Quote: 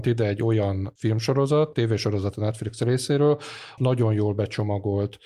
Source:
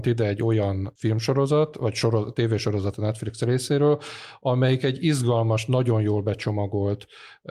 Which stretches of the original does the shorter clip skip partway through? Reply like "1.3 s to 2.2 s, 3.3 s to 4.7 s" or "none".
1.7 s to 2.3 s, 4.4 s to 5.7 s